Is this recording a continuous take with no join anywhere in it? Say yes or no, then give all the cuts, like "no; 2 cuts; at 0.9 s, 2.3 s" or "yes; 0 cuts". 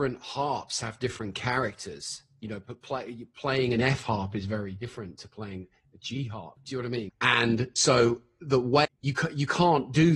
no; 2 cuts; at 7.1 s, 8.8 s